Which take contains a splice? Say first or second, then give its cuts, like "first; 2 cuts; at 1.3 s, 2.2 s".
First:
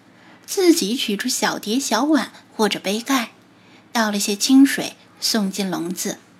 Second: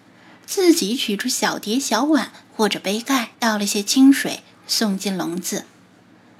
second; 1 cut; at 3.3 s